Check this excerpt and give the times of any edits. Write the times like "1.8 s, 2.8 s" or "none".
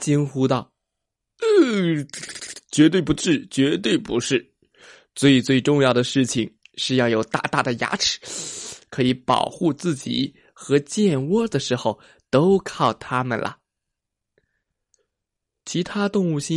none